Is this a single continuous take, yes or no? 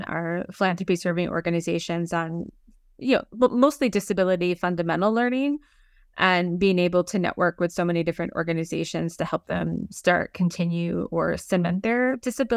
yes